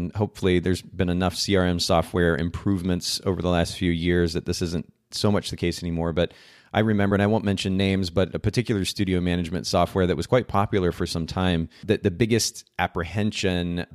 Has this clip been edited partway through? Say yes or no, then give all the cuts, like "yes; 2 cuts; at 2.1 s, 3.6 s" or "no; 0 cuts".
no; 0 cuts